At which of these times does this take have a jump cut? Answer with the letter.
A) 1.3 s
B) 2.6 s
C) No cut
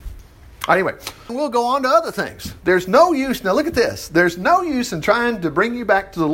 A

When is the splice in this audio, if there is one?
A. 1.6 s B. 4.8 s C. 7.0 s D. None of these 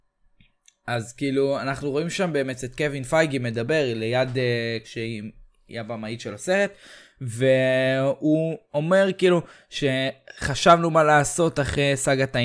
B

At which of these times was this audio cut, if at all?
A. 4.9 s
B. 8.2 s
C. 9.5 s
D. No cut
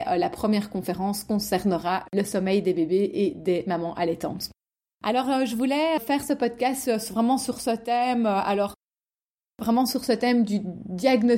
A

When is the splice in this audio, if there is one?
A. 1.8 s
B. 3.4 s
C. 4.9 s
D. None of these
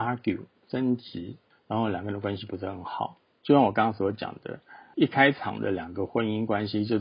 B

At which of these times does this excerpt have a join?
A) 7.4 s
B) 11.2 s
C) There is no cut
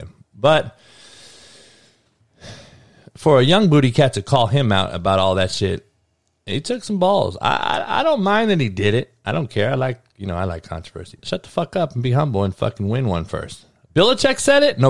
B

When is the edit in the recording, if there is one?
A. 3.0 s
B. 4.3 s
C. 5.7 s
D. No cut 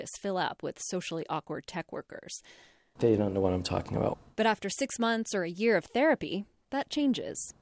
A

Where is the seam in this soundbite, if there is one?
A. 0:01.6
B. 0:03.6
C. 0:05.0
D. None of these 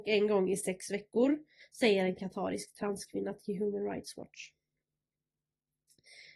A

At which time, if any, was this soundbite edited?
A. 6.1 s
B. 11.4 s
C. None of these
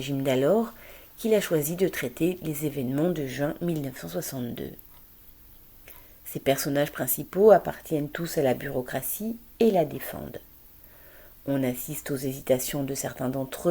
C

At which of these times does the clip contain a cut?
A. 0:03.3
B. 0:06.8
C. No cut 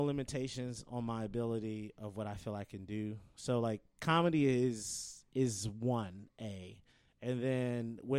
C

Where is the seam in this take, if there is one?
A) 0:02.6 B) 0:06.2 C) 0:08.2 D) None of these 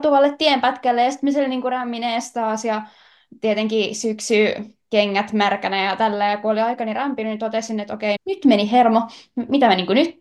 C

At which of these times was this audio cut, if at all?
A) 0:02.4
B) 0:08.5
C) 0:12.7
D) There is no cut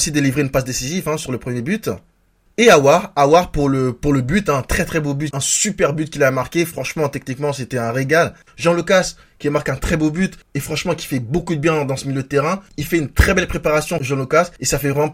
B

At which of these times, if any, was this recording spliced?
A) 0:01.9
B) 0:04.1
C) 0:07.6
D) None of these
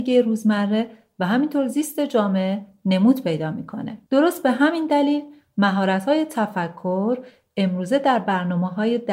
B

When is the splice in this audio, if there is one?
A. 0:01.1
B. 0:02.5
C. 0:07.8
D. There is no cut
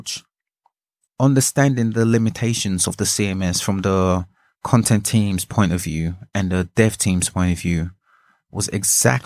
A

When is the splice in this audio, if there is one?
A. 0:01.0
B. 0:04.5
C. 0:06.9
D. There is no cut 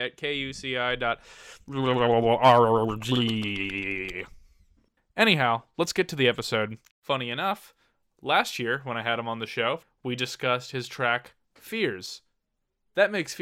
C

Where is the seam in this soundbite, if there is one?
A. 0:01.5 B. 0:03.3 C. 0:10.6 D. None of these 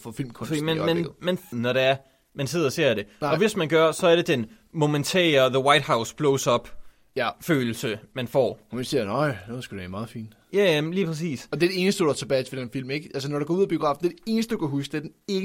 A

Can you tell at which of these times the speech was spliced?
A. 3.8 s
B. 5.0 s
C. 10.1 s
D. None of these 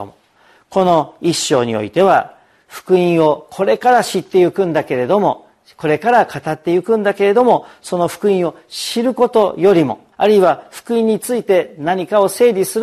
C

